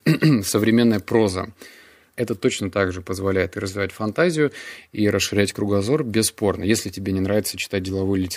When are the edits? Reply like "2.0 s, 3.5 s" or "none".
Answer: 2.1 s